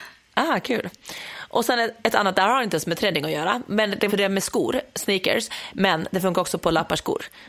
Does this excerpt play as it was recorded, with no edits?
no; 1 cut; at 4.1 s

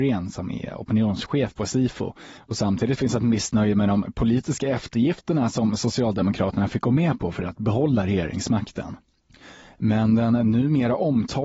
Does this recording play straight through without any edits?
no; 1 cut; at 2.4 s

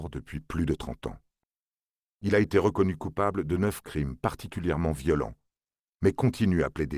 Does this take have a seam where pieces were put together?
yes; 1 cut; at 2.0 s

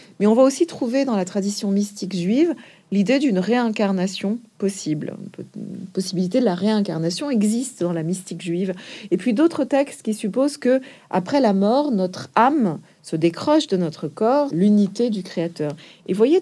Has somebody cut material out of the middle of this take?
yes; 2 cuts; at 9.1 s, 14.5 s

